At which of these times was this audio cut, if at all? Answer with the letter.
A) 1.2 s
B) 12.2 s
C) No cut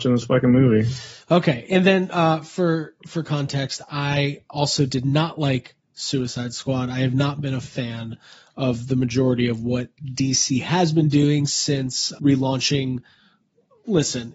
B